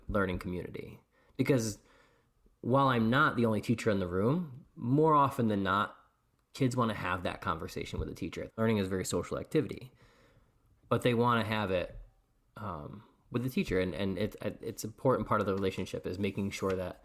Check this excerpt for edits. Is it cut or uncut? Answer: cut